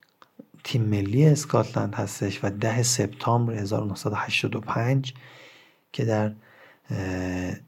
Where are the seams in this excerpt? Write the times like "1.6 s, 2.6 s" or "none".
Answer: none